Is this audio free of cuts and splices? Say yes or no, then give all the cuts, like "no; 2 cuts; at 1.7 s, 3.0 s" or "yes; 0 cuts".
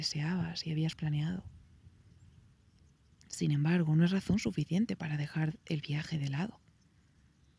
yes; 0 cuts